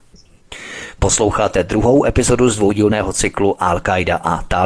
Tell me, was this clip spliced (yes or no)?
yes